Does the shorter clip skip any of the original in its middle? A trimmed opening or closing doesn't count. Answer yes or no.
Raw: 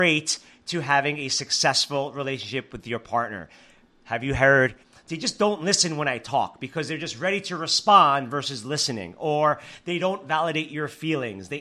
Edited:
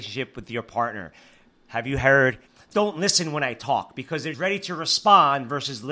yes